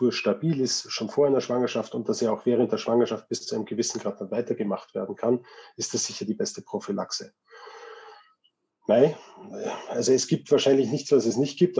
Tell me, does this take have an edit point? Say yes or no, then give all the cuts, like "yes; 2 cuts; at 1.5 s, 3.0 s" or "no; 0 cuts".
no; 0 cuts